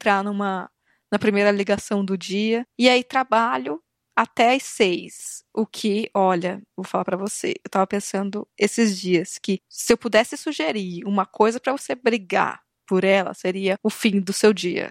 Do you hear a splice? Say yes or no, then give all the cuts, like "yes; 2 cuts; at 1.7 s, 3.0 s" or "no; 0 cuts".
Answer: no; 0 cuts